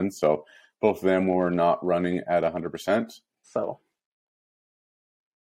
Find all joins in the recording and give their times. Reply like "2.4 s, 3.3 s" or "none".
3.4 s